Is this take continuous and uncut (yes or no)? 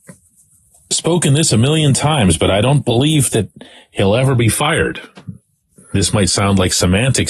yes